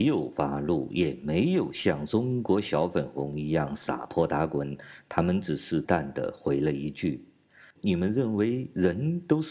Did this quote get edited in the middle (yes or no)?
yes